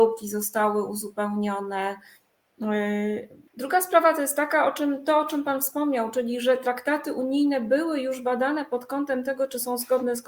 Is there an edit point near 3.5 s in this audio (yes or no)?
yes